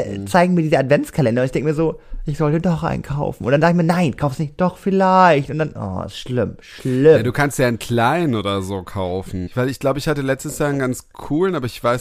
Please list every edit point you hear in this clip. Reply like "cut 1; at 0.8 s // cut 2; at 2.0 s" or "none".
cut 1; at 9.5 s